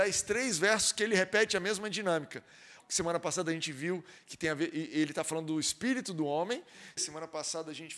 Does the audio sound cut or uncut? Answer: cut